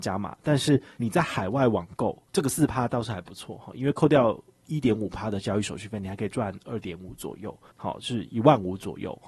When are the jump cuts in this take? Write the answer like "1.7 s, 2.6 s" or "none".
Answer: 2.3 s, 7.7 s